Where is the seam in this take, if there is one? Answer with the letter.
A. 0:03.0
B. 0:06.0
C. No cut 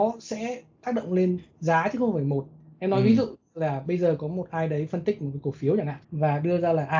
B